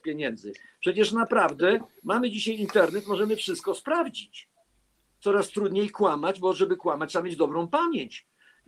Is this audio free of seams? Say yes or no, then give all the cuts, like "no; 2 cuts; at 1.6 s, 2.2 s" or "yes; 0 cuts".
yes; 0 cuts